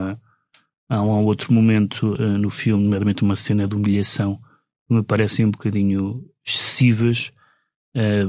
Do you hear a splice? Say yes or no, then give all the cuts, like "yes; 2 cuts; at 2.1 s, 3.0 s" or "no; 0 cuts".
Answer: no; 0 cuts